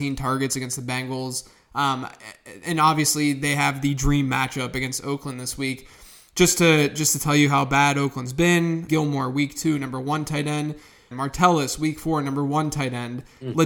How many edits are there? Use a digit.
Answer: 2